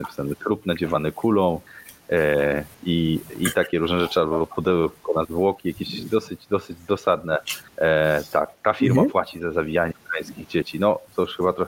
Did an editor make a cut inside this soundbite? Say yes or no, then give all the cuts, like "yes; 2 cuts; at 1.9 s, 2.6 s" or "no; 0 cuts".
no; 0 cuts